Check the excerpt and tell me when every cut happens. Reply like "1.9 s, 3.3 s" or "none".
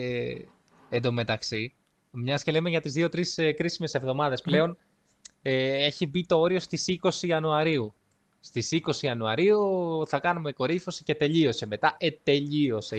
none